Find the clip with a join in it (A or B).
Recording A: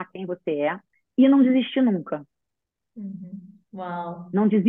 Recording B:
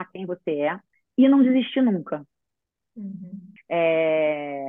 B